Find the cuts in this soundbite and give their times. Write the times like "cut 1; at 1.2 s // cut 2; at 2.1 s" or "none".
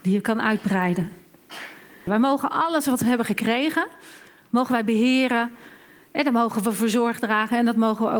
cut 1; at 2.1 s